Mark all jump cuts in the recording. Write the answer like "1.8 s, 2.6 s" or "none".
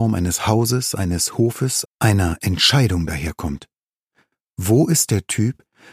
1.9 s